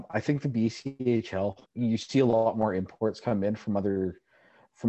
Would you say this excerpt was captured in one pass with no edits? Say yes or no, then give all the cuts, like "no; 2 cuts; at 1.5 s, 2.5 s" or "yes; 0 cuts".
no; 1 cut; at 1.7 s